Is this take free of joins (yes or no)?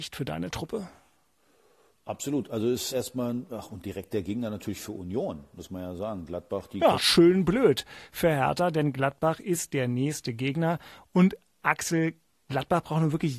no